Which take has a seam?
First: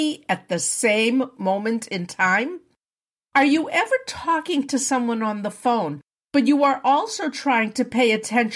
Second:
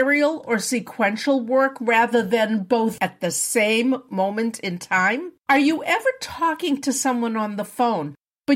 second; 2 cuts; at 3.0 s, 5.4 s

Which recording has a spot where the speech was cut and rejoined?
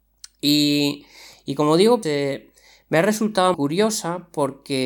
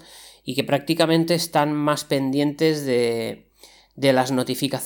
first; 2 cuts; at 2.0 s, 3.5 s

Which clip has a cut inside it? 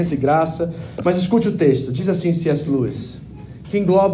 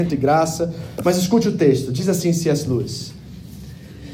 first; 1 cut; at 2.6 s

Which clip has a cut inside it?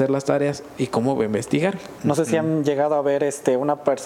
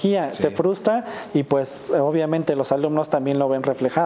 first; 1 cut; at 2.0 s

